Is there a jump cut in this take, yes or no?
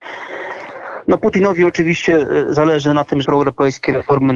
yes